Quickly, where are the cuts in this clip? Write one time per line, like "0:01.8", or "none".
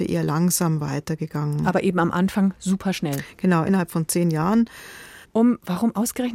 0:03.7
0:05.2